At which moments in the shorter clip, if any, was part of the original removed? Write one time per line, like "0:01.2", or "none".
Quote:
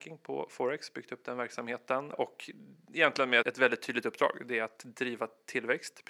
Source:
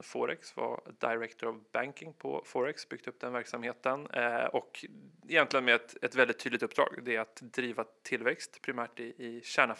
0:02.1
0:03.4

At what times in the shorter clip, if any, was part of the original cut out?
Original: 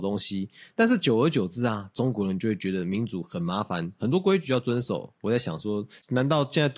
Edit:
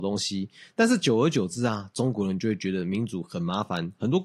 none

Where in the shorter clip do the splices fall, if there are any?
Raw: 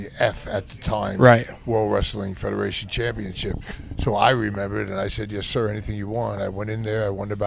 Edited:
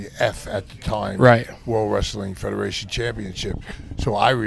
none

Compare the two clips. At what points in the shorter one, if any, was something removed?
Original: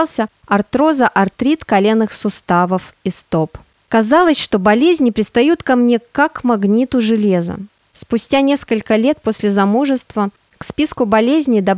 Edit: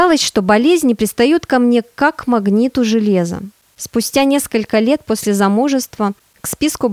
none

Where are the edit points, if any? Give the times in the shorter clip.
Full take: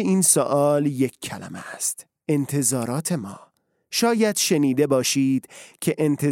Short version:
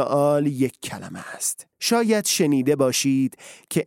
0:01.7

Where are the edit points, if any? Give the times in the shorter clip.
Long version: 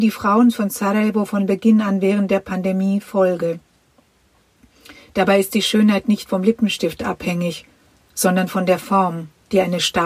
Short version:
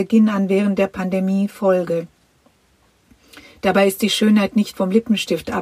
none

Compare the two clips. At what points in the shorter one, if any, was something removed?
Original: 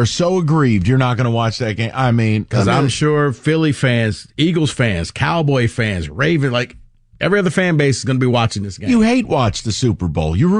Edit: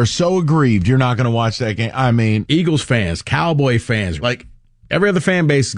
0:02.4
0:04.2

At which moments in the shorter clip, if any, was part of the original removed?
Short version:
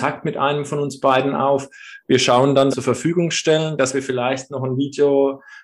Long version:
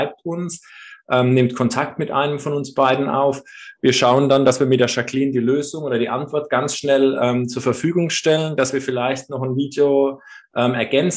0:02.7

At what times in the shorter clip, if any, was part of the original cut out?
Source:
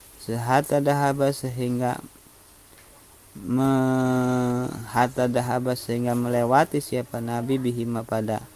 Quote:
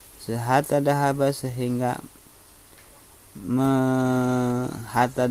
none

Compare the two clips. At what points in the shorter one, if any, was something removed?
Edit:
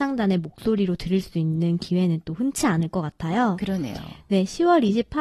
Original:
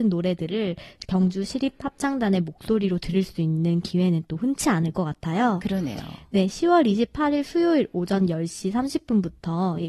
none

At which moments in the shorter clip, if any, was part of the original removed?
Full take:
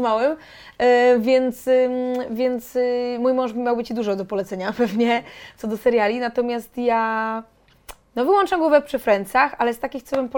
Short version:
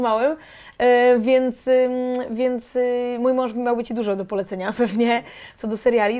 none

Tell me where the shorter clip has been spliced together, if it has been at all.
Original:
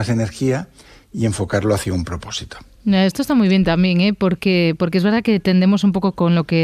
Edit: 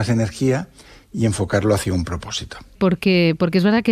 0:02.7

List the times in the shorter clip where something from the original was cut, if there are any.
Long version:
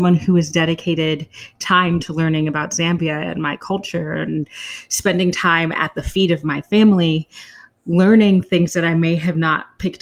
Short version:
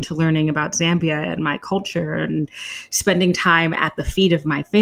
none

